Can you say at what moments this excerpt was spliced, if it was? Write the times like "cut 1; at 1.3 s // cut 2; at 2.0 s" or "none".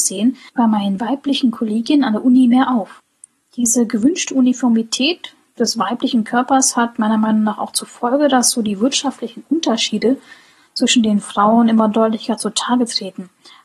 none